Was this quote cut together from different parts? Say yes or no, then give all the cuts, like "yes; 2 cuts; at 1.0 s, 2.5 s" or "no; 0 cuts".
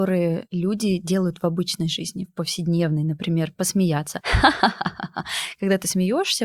no; 0 cuts